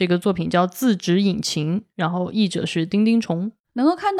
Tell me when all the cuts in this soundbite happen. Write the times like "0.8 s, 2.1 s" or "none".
none